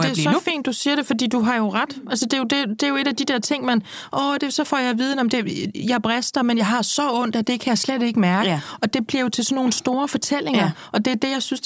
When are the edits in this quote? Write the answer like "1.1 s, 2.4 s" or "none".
none